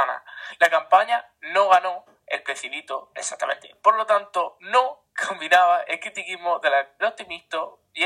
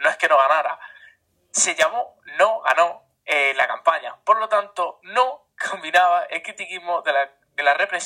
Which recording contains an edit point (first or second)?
first